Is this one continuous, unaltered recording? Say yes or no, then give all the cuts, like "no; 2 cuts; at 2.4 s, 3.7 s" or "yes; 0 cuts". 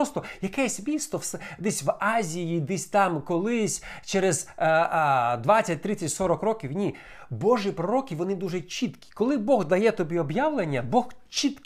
yes; 0 cuts